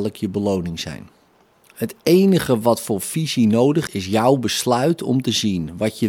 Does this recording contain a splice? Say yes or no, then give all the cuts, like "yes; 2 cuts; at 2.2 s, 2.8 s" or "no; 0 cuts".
yes; 1 cut; at 3.9 s